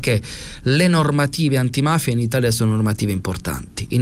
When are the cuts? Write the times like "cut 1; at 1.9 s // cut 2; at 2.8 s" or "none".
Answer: none